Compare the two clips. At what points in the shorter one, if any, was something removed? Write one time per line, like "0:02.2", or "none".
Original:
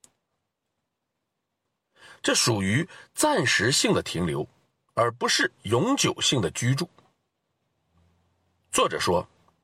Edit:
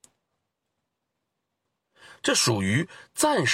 none